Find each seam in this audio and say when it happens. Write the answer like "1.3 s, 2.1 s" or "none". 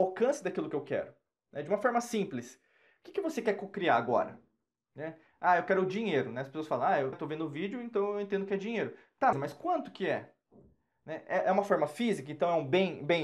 7.1 s, 9.3 s